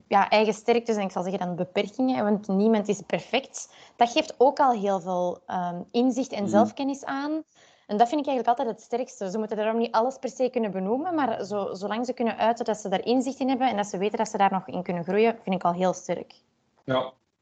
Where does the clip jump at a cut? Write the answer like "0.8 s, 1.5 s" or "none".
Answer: none